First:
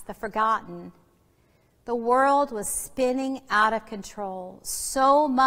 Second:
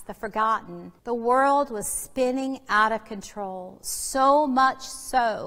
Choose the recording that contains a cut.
second; 1 cut; at 1.0 s

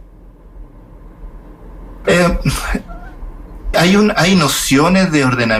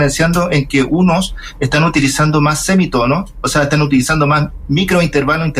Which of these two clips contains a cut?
first; 2 cuts; at 2.0 s, 3.7 s

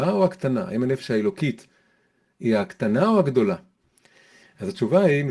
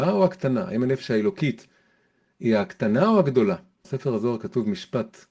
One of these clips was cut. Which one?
second; 1 cut; at 3.8 s

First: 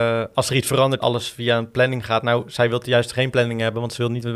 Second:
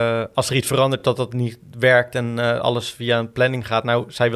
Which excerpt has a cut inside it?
first; 1 cut; at 1.0 s

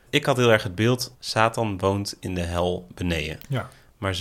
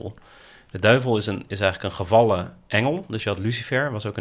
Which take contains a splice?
first; 1 cut; at 1.1 s

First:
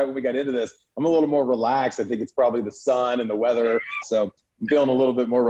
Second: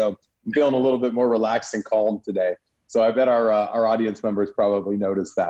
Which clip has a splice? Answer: first; 1 cut; at 4.0 s

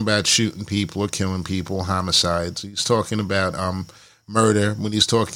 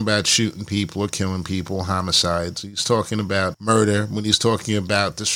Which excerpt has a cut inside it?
second; 1 cut; at 3.5 s

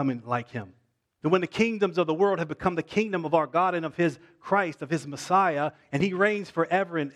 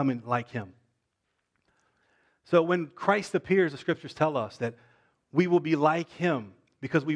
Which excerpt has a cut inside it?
first; 1 cut; at 1.2 s

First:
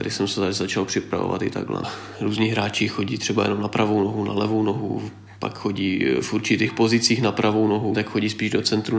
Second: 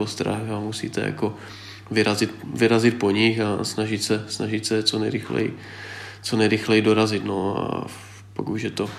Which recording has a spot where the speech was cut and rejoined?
first; 2 cuts; at 1.8 s, 7.9 s

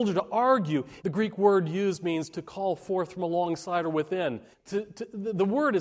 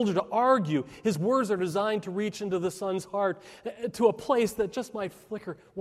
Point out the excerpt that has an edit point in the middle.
first; 2 cuts; at 1.0 s, 4.5 s

